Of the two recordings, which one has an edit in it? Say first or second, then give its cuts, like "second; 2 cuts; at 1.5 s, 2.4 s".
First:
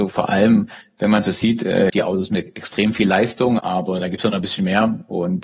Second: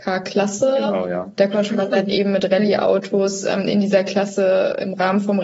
first; 2 cuts; at 1.9 s, 3.6 s